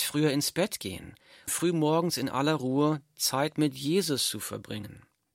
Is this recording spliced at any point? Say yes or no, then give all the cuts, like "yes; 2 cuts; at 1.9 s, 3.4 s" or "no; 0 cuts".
yes; 1 cut; at 1.5 s